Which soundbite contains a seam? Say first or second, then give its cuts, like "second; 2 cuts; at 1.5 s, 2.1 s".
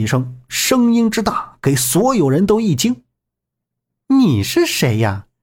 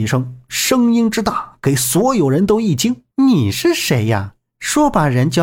second; 1 cut; at 3.1 s